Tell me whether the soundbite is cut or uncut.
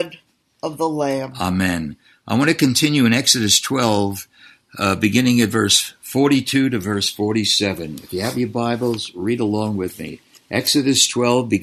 uncut